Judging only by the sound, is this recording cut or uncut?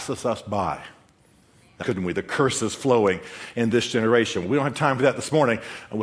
cut